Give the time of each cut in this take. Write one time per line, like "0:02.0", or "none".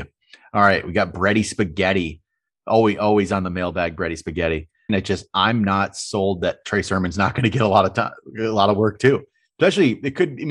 0:04.9